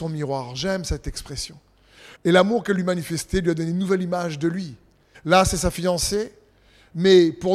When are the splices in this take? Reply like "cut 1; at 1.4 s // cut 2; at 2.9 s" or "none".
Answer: cut 1; at 2.1 s // cut 2; at 5.1 s